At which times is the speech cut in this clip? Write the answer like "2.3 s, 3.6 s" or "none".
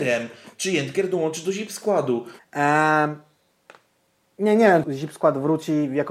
2.4 s, 4.8 s